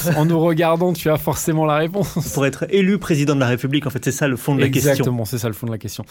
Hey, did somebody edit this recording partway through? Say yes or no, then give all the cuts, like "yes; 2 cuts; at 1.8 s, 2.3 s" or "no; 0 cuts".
no; 0 cuts